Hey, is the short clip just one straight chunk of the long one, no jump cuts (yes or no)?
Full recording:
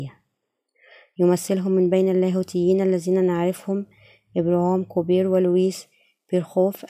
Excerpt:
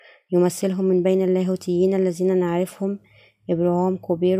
yes